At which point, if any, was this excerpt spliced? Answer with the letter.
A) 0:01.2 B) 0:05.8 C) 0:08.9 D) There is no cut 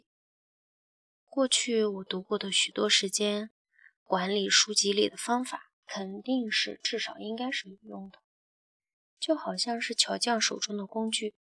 D